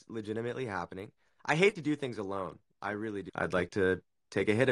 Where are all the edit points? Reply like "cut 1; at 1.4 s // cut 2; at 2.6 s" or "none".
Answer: cut 1; at 1.4 s // cut 2; at 3.3 s